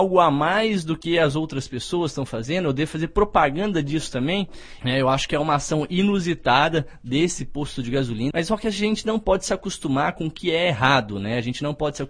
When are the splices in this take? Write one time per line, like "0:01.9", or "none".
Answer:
0:04.8
0:08.3